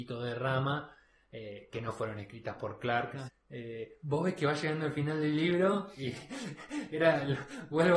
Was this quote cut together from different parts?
yes; 1 cut; at 3.3 s

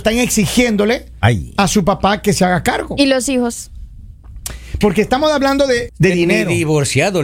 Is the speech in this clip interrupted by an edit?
yes; 2 cuts; at 4.8 s, 5.9 s

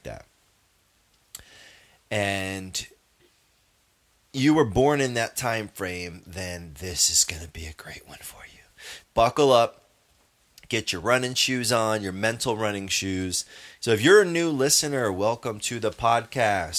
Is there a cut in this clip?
yes; 2 cuts; at 9.0 s, 13.8 s

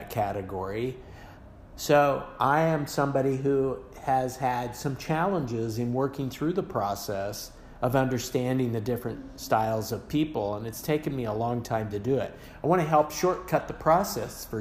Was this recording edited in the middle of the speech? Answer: no; 0 cuts

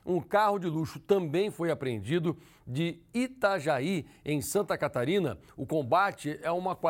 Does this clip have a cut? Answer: no; 0 cuts

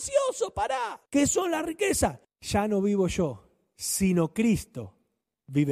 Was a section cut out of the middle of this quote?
yes; 2 cuts; at 1.1 s, 2.2 s

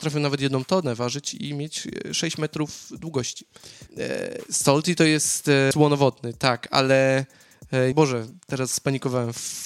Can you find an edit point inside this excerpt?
yes; 3 cuts; at 3.9 s, 5.7 s, 7.9 s

